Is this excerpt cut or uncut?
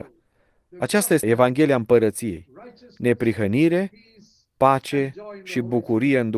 cut